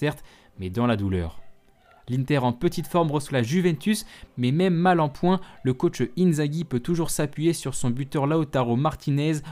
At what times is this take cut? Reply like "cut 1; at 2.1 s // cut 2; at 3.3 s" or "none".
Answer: cut 1; at 3.3 s